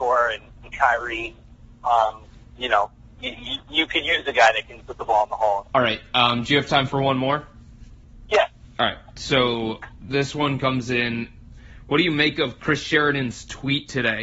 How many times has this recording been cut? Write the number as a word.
one